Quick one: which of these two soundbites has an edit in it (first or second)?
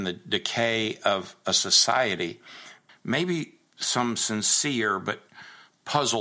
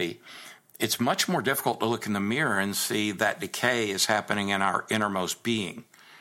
first